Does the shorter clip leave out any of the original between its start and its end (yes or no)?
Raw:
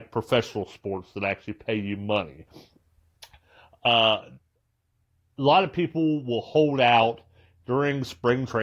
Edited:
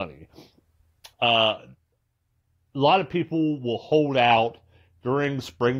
yes